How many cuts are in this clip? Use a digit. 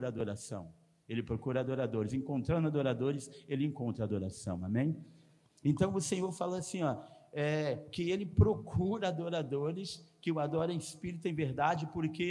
0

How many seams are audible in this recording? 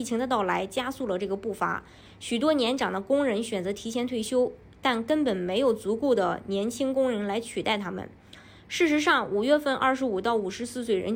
0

